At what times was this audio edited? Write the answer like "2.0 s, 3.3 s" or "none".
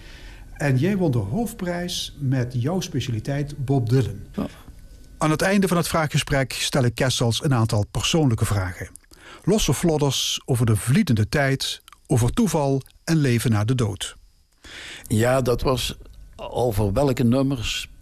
4.3 s, 15.0 s